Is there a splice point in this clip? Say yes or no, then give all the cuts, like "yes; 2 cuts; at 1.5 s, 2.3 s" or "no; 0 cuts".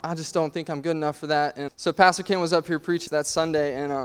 yes; 2 cuts; at 1.7 s, 3.1 s